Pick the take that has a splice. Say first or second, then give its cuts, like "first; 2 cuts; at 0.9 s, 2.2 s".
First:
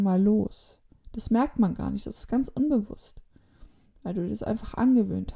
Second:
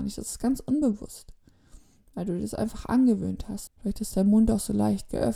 second; 1 cut; at 3.7 s